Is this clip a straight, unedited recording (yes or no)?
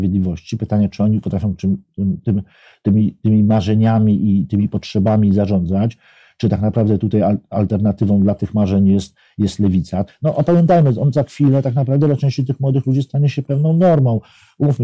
no